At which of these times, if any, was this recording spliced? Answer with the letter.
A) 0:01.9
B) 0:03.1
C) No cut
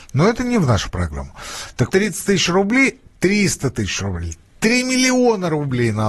A